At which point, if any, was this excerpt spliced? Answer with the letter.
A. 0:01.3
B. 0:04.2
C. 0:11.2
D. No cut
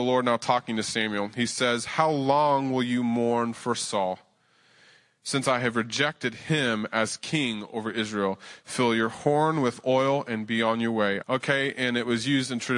C